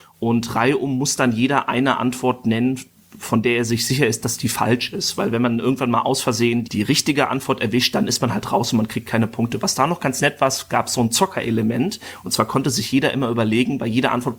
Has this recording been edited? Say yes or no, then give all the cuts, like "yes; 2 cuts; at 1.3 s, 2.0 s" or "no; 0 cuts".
yes; 1 cut; at 6.6 s